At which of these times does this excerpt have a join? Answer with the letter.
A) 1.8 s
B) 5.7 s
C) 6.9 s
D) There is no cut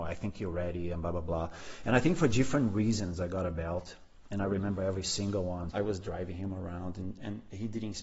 B